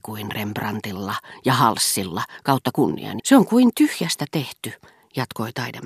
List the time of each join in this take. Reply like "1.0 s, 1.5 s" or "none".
3.2 s